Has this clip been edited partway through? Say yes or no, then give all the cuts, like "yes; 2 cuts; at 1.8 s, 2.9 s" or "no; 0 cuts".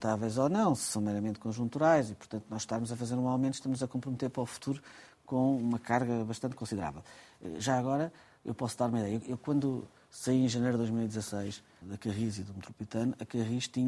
yes; 1 cut; at 11.8 s